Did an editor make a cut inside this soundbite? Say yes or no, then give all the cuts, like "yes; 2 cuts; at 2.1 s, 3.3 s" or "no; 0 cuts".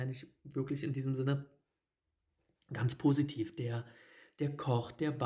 no; 0 cuts